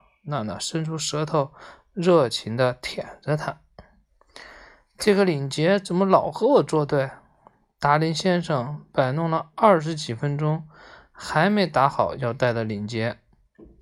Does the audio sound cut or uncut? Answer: uncut